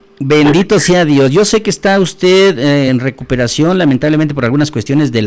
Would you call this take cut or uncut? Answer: uncut